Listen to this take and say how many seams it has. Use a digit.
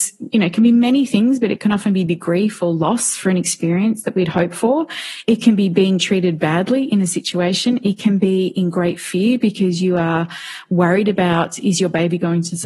0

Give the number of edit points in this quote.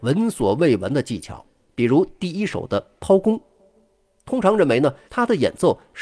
1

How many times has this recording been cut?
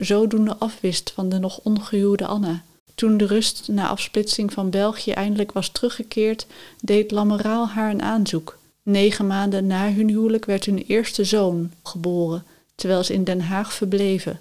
2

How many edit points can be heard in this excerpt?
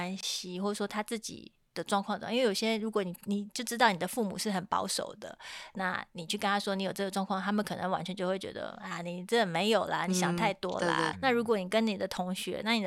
1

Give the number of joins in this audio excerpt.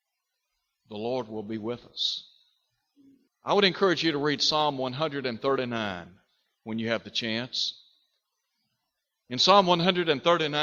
1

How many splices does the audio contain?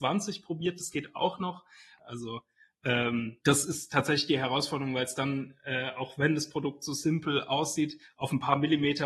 2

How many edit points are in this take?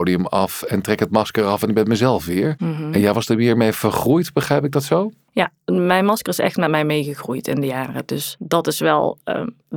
0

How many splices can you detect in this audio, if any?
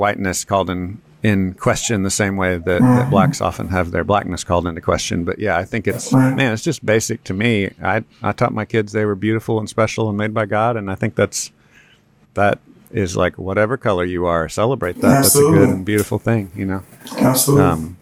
0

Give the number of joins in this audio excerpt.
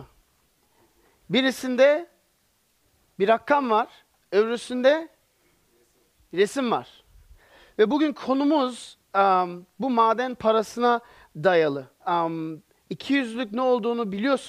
1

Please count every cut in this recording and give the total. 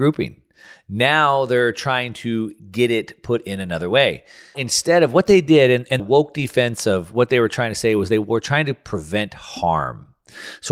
2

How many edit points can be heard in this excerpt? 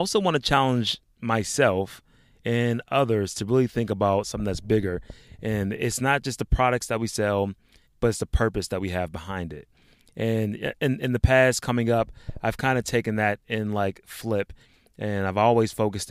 1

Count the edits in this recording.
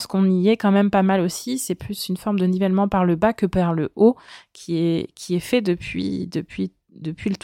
0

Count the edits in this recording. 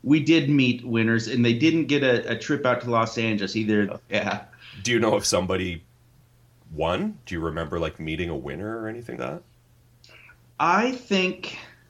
2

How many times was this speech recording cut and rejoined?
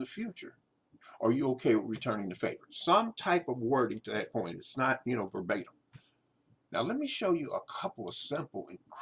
0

